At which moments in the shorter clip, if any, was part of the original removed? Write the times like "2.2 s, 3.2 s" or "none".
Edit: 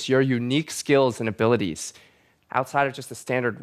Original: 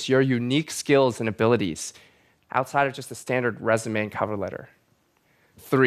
none